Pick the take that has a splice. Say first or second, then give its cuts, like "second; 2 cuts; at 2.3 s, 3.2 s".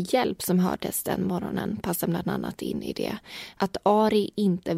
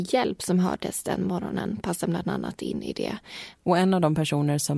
second; 1 cut; at 3.5 s